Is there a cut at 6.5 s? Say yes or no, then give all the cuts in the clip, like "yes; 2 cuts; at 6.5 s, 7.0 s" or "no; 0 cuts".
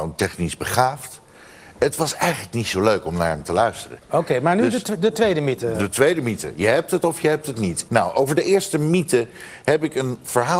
no; 1 cut; at 7.9 s